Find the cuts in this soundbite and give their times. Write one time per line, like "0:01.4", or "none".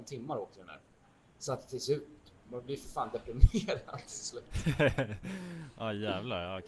0:01.2